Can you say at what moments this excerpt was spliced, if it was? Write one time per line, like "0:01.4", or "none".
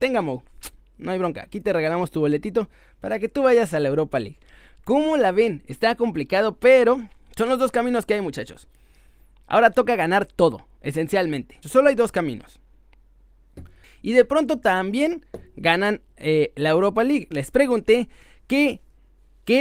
0:11.6
0:13.8
0:17.3